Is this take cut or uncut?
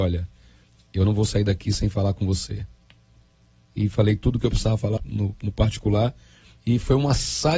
cut